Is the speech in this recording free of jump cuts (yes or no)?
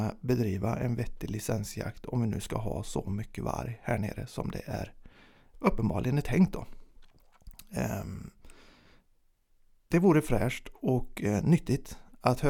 yes